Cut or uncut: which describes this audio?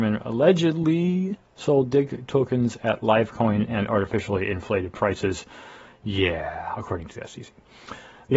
uncut